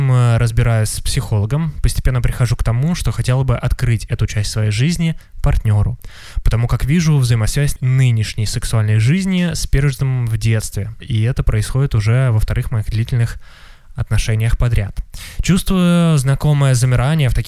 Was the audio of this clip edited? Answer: yes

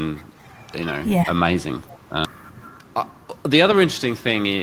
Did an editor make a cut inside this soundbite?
no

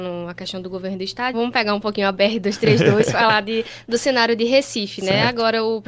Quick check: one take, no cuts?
no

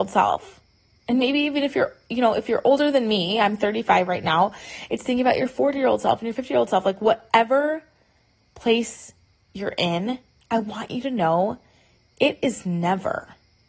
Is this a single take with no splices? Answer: yes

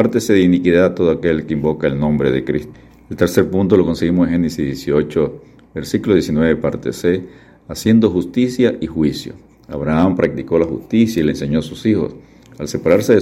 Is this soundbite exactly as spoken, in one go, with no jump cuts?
yes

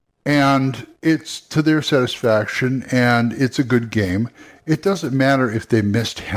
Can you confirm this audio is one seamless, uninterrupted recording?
no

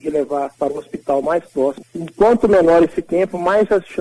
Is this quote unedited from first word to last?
yes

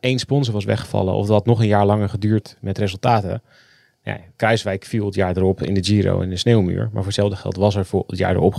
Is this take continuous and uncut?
yes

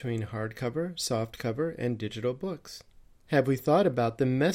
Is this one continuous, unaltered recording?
yes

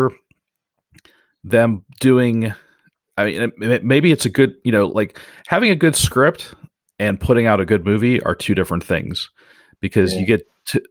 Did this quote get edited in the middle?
no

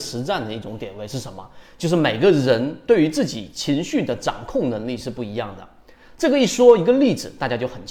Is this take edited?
no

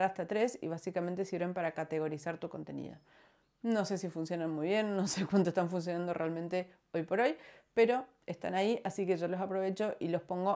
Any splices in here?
no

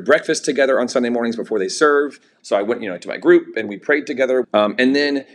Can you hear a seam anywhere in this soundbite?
yes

